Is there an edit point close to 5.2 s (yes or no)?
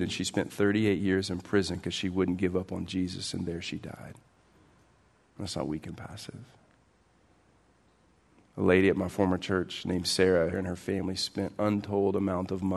yes